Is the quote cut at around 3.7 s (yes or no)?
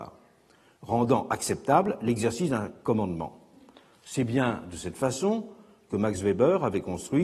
no